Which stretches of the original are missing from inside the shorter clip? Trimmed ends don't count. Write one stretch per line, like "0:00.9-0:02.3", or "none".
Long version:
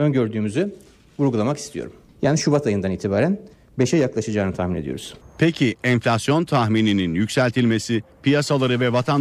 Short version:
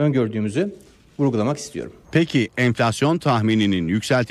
0:02.0-0:05.3